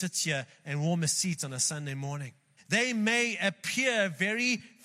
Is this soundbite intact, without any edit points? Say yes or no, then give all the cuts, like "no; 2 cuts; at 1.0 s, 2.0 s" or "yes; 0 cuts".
no; 1 cut; at 2.6 s